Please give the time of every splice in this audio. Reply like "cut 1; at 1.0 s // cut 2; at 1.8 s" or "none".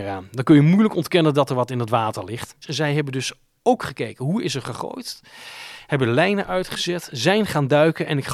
none